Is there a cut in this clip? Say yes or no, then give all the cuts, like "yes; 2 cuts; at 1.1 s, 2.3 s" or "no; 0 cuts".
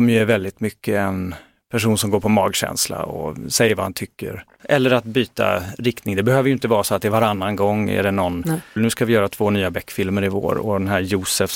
yes; 2 cuts; at 4.6 s, 8.8 s